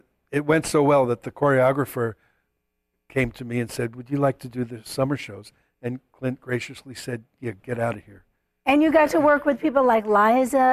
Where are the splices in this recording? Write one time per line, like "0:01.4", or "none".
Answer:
none

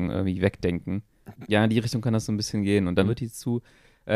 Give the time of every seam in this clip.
0:01.5
0:03.0

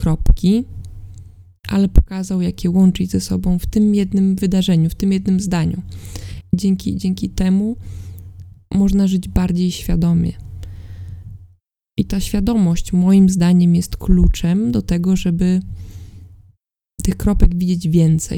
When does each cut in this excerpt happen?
0:06.4

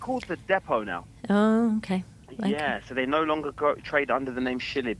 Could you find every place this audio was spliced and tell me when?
none

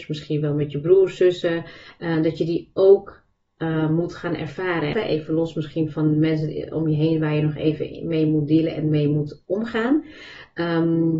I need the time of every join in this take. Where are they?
0:04.9

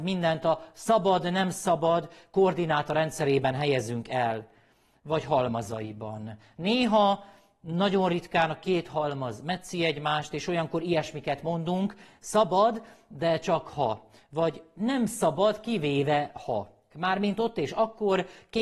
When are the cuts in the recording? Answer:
0:16.9

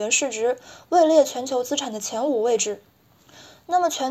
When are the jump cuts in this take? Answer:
none

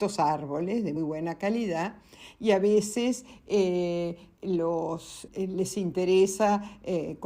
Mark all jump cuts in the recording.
0:01.0
0:05.3

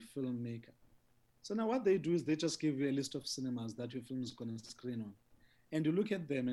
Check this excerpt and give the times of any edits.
none

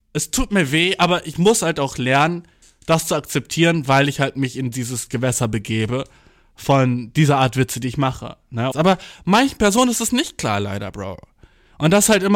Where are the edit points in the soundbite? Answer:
0:08.7

